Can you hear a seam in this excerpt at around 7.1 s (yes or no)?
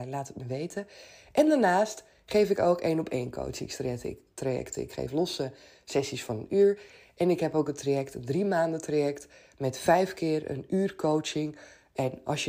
no